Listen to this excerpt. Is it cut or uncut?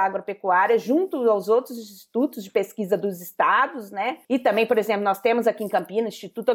cut